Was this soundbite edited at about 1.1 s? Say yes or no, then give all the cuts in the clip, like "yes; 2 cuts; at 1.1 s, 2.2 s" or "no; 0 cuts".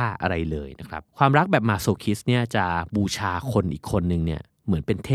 yes; 1 cut; at 1.1 s